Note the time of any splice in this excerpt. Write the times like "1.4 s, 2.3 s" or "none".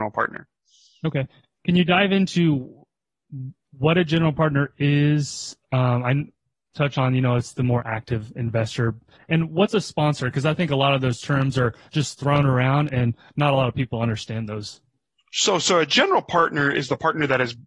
6.7 s